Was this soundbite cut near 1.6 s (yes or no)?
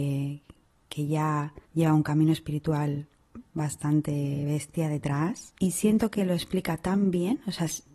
yes